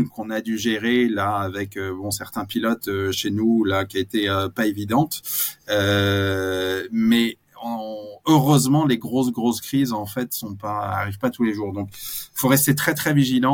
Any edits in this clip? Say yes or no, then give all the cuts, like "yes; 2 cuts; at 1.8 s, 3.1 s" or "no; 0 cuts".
no; 0 cuts